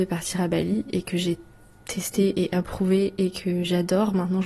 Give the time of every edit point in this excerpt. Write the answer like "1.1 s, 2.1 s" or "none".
none